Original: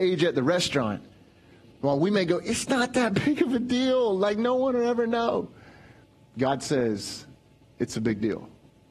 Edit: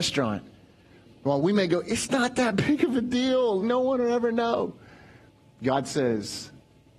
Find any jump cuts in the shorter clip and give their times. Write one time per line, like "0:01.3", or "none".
0:03.6